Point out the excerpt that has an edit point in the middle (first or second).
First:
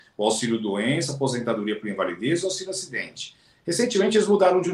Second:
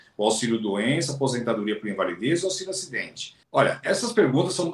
second